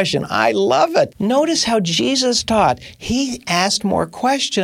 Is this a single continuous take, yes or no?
no